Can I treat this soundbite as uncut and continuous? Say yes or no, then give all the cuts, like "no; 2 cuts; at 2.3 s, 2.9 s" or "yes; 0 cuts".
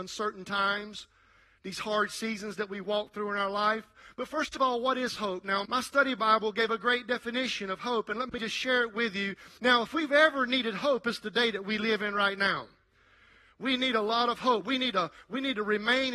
no; 2 cuts; at 5.7 s, 9.6 s